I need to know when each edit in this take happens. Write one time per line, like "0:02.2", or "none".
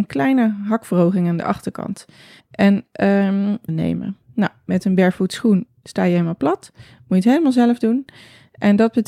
0:02.4
0:03.7